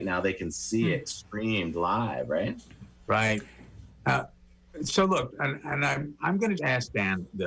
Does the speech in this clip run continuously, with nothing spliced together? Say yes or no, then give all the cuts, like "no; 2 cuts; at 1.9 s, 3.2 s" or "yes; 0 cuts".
no; 2 cuts; at 5.3 s, 6.6 s